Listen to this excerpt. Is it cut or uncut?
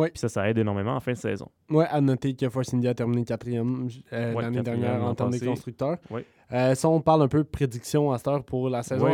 uncut